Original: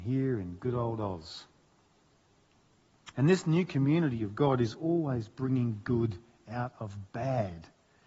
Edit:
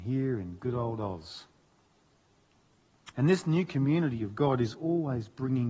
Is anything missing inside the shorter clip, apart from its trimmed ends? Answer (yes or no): no